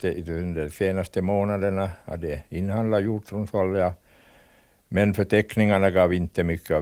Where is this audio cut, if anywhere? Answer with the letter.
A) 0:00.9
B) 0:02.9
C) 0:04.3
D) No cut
D